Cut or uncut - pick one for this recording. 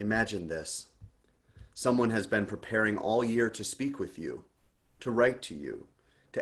uncut